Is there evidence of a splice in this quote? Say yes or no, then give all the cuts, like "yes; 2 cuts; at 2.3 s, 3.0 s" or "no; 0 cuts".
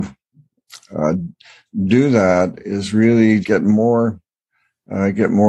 yes; 1 cut; at 3.4 s